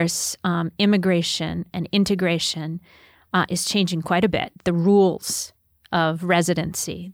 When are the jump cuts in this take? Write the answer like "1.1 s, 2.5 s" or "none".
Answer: none